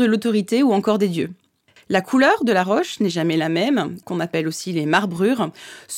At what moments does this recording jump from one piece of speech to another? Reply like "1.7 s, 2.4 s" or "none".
1.8 s, 4.0 s